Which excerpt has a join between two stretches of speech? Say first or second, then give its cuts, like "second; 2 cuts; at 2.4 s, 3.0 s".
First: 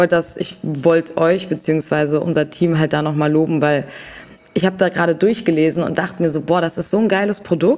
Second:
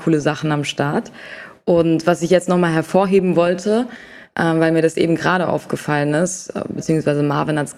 second; 1 cut; at 6.8 s